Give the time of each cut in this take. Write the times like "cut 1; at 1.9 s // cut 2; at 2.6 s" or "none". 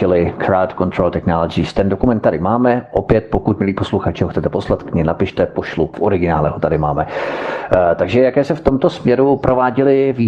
cut 1; at 5.9 s